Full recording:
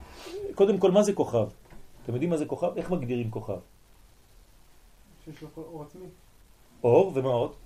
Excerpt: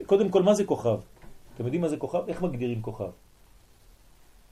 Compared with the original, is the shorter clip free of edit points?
yes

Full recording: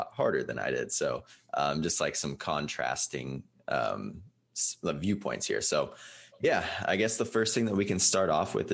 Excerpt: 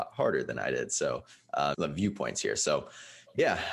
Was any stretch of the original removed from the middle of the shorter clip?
yes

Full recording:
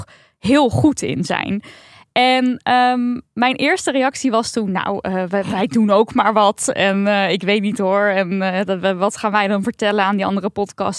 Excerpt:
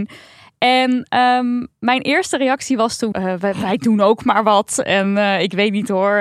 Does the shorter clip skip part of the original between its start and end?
yes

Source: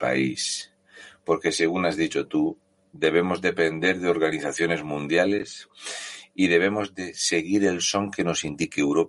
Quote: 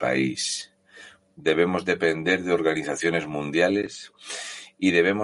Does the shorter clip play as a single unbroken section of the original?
no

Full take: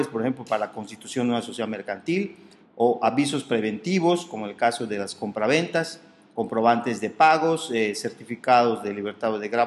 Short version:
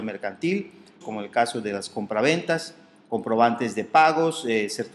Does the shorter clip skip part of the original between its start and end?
yes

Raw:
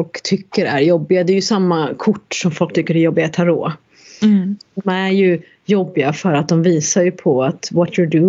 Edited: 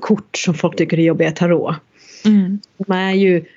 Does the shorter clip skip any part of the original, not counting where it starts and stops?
no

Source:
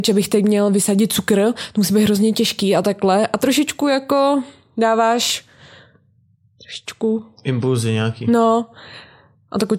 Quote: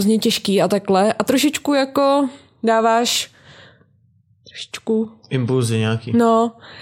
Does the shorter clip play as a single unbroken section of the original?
yes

